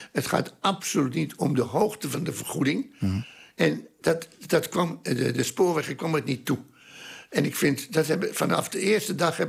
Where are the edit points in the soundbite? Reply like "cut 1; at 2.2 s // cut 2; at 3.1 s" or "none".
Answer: cut 1; at 3.5 s